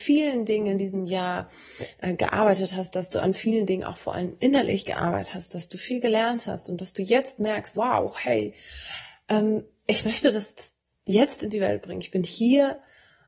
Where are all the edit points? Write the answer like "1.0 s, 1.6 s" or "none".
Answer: 7.7 s